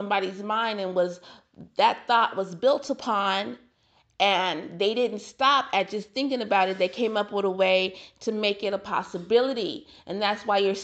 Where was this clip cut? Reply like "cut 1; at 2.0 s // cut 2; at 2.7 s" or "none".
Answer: none